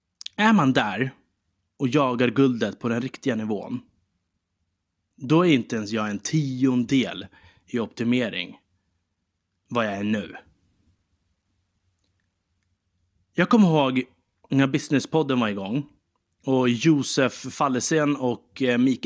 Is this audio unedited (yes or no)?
yes